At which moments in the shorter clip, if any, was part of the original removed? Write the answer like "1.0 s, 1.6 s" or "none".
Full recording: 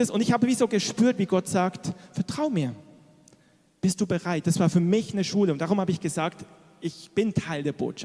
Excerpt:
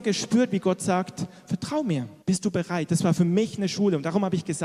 2.2 s